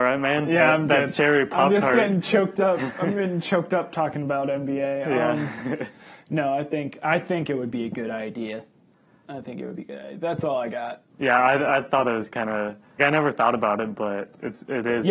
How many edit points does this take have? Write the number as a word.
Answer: one